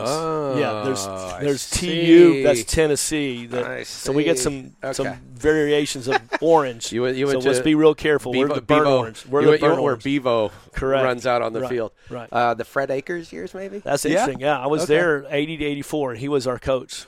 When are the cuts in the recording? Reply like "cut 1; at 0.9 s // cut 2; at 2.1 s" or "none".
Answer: cut 1; at 13.8 s